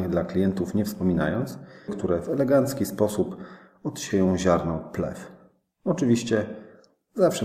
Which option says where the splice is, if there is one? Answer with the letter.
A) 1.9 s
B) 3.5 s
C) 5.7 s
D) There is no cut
A